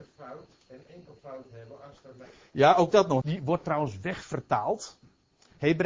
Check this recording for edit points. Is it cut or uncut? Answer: cut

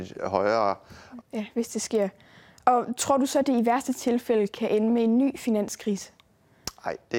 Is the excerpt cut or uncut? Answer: cut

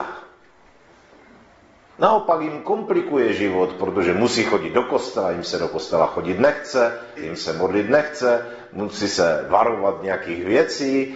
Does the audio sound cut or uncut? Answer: cut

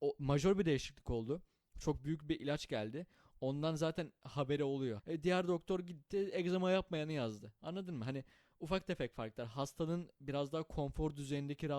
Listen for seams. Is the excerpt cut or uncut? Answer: cut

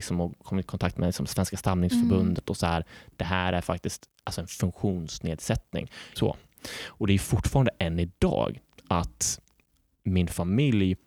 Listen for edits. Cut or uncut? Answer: cut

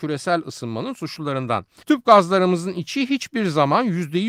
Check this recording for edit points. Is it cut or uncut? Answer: cut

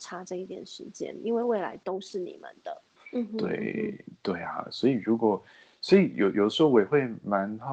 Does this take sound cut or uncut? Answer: cut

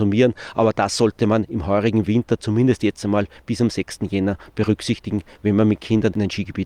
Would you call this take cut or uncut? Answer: uncut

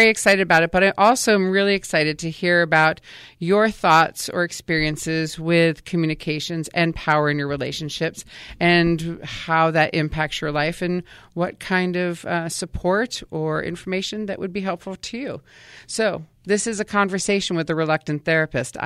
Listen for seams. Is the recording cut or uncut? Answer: uncut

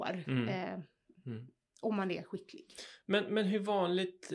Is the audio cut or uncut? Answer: uncut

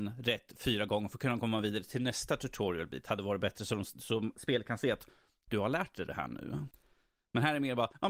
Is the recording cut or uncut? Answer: uncut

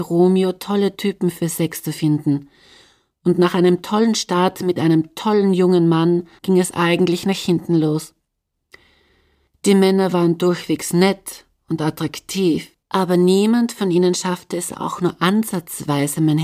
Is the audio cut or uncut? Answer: cut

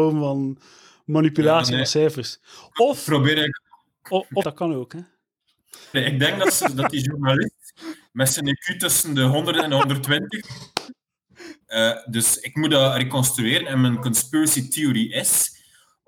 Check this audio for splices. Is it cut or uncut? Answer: cut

